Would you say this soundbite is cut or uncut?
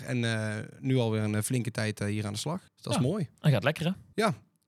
cut